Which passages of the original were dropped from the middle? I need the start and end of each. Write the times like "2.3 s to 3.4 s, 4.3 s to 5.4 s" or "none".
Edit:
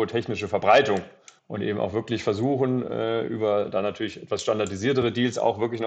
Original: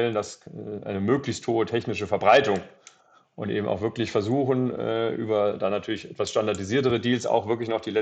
3.0 s to 3.3 s